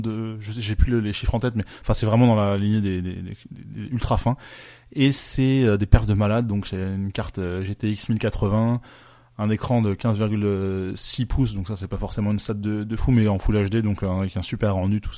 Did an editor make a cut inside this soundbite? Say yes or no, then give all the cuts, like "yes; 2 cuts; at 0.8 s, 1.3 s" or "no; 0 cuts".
no; 0 cuts